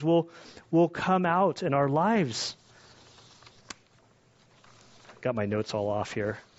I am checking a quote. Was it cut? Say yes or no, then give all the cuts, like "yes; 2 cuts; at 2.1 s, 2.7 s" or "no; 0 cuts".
no; 0 cuts